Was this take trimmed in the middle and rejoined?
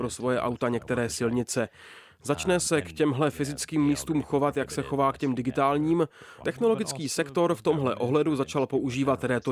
yes; 1 cut; at 6.4 s

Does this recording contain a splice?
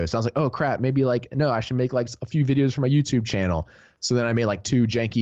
no; 0 cuts

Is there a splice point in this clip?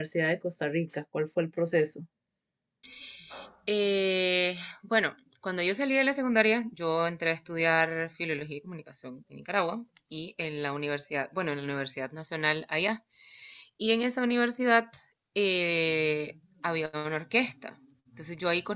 no; 0 cuts

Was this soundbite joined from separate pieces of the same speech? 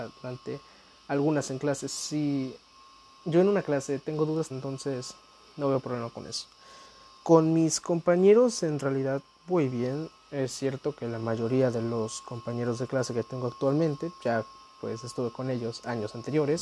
yes; 1 cut; at 4.5 s

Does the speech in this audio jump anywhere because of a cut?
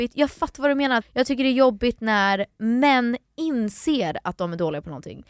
yes; 1 cut; at 1.0 s

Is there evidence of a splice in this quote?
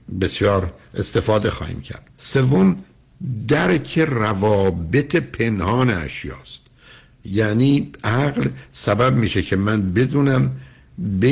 yes; 1 cut; at 2.1 s

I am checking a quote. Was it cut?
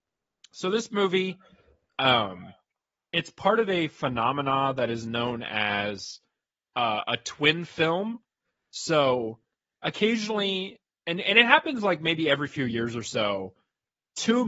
no; 0 cuts

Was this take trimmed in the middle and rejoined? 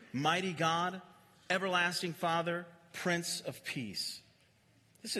no; 0 cuts

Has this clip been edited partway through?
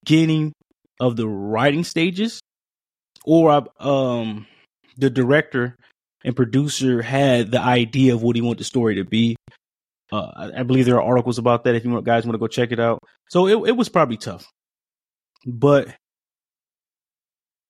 no; 0 cuts

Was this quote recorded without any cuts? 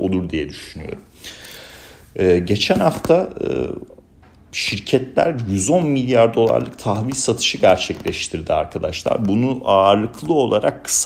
yes; 0 cuts

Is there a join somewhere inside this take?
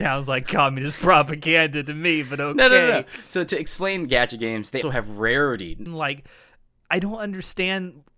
yes; 2 cuts; at 4.8 s, 5.9 s

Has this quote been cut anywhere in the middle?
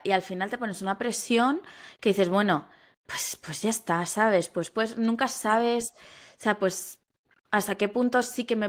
no; 0 cuts

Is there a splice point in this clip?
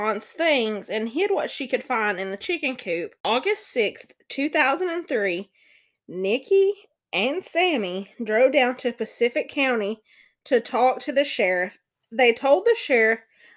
no; 0 cuts

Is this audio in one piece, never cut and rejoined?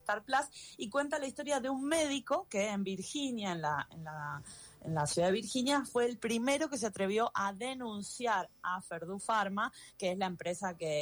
yes; 0 cuts

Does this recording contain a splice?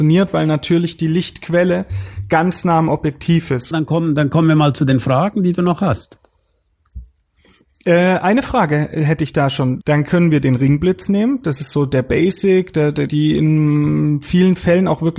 yes; 3 cuts; at 3.7 s, 9.8 s, 13.1 s

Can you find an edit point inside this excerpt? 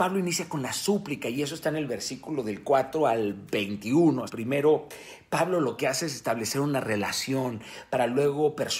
yes; 1 cut; at 4.3 s

